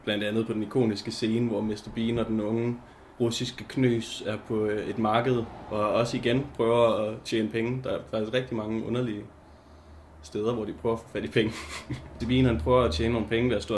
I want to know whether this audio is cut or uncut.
cut